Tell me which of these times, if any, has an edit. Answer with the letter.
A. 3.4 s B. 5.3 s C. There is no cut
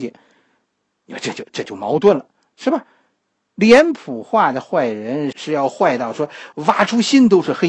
B